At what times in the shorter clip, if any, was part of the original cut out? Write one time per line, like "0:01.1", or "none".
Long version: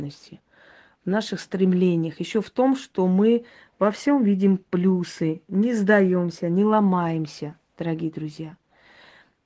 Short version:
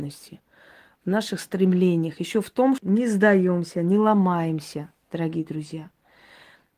0:02.8